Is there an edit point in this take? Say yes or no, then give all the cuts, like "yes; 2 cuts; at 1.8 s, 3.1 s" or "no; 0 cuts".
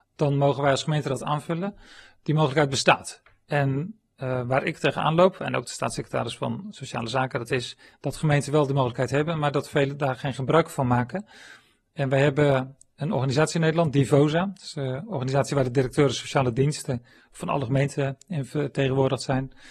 no; 0 cuts